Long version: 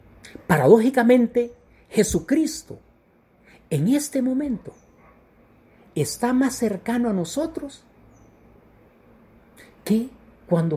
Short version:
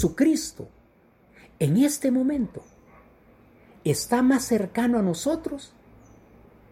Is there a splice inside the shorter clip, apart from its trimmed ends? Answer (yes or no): no